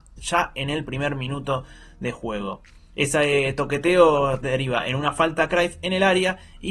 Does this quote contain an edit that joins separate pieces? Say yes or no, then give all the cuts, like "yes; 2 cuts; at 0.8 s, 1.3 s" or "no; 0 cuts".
no; 0 cuts